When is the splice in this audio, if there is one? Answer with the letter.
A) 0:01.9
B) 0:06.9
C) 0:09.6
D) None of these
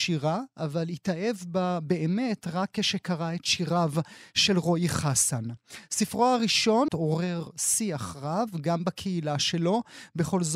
B